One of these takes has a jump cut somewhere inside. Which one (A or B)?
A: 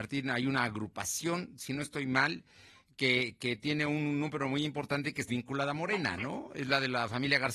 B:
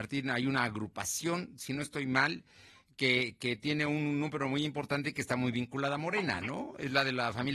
A